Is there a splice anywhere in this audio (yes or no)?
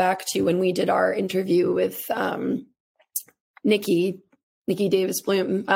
no